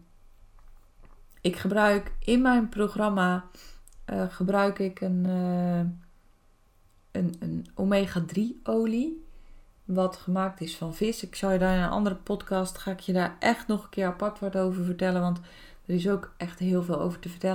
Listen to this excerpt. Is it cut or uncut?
uncut